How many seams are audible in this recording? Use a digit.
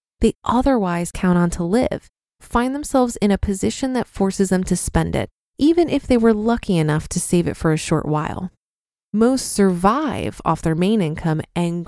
1